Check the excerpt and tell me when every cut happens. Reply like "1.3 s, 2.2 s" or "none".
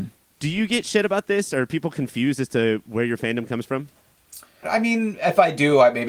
4.6 s